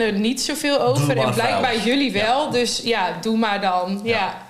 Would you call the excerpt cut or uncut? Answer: uncut